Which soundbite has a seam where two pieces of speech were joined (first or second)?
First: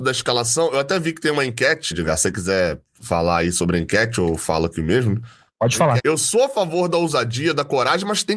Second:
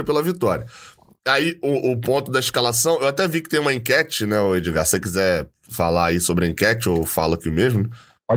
first